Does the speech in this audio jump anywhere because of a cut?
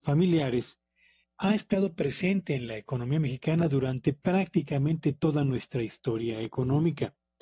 no; 0 cuts

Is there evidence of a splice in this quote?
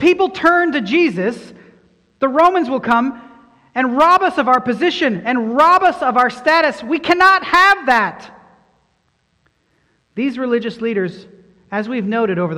no; 0 cuts

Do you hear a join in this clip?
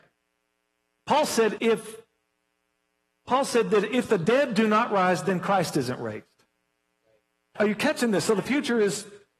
yes; 2 cuts; at 1.6 s, 7.6 s

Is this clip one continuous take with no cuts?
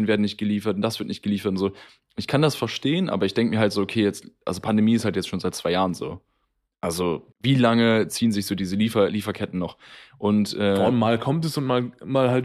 no; 1 cut; at 7.3 s

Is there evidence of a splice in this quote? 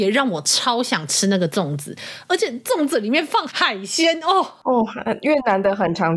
yes; 1 cut; at 3.5 s

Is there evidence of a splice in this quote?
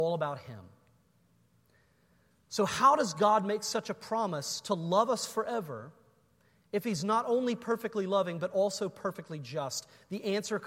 no; 0 cuts

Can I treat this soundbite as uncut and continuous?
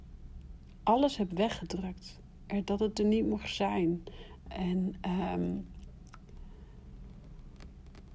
no; 1 cut; at 4.5 s

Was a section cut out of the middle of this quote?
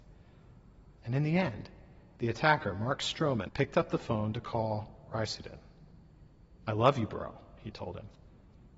yes; 1 cut; at 3.5 s

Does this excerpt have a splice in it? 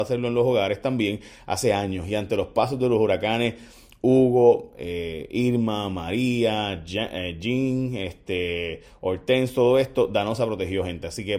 no; 0 cuts

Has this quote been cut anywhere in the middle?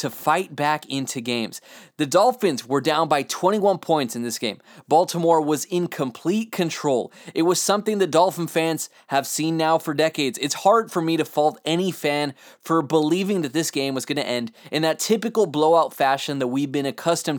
no; 0 cuts

